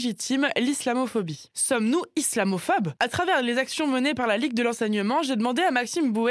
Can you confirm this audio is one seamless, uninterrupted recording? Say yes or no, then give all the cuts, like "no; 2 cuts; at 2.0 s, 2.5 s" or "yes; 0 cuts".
yes; 0 cuts